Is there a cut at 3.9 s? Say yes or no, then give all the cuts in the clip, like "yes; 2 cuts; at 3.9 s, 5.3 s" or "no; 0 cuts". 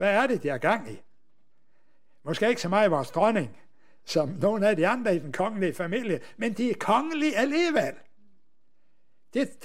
no; 0 cuts